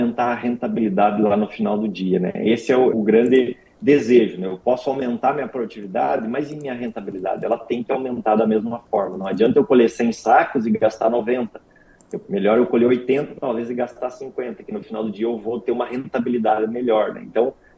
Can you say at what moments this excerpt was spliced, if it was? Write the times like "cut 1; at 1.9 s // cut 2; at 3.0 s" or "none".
cut 1; at 2.9 s